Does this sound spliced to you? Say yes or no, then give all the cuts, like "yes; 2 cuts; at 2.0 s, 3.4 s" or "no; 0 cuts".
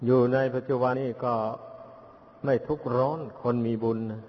yes; 1 cut; at 0.9 s